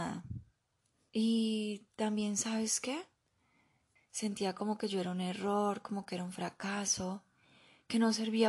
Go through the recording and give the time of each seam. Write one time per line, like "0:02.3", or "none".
0:01.1
0:04.0